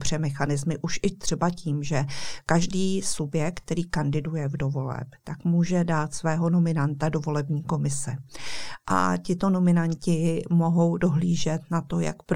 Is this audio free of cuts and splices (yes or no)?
yes